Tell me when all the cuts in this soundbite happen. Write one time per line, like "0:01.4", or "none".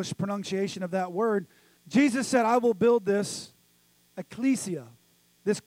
0:01.8